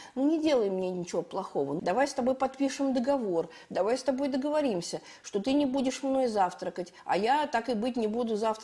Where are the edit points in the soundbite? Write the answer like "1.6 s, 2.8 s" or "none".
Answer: 1.8 s